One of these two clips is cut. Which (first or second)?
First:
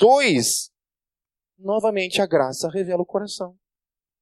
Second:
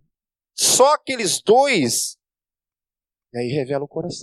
first